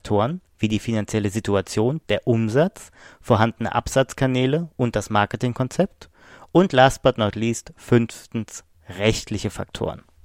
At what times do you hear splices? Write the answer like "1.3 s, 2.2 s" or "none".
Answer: 2.0 s